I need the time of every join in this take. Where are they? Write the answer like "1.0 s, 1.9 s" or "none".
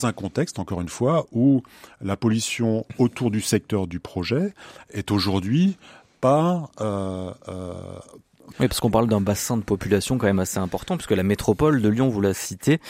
8.5 s